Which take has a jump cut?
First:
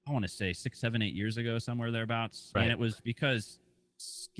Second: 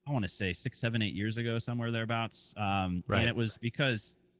first; 1 cut; at 2.5 s

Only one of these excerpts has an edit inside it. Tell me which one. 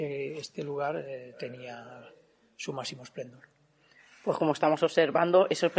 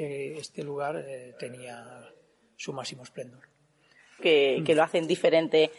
second; 1 cut; at 4.2 s

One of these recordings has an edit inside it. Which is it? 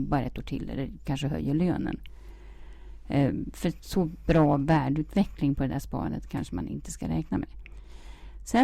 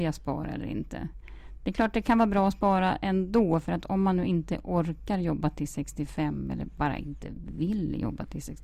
first; 1 cut; at 3.8 s

